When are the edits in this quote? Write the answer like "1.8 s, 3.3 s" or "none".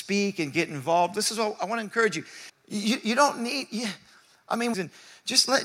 2.5 s, 4.7 s